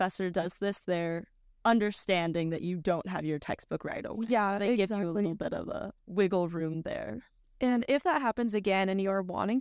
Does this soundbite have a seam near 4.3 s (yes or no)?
no